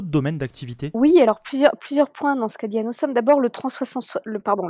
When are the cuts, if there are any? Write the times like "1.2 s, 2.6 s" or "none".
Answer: none